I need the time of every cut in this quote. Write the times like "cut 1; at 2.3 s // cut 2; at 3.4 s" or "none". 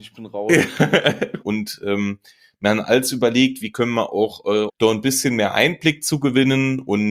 cut 1; at 1.4 s // cut 2; at 3.6 s // cut 3; at 4.7 s